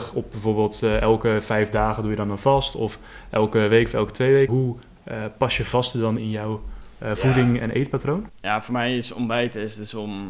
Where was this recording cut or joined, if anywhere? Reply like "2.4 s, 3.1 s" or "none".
4.5 s, 6.2 s